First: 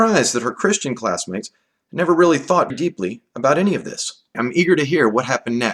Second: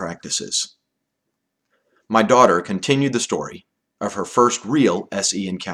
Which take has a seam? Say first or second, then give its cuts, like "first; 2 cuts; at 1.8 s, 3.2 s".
first; 2 cuts; at 2.7 s, 4.3 s